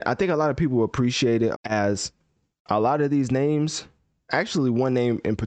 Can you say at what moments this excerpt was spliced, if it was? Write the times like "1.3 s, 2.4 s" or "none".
1.5 s